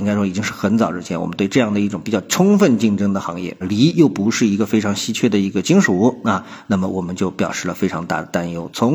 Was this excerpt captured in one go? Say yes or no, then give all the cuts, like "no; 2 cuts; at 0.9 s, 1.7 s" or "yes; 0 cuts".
no; 1 cut; at 3.6 s